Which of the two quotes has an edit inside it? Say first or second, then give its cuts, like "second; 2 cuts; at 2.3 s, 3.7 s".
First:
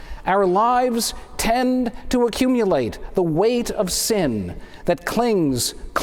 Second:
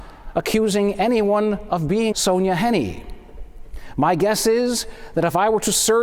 second; 1 cut; at 2.1 s